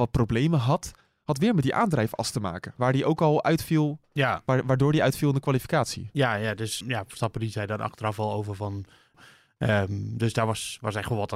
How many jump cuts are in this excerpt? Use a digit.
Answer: 2